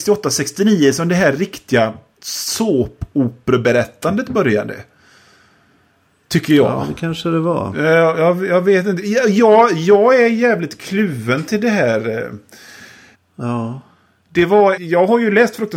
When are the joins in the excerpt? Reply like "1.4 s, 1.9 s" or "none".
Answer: 13.1 s, 14.8 s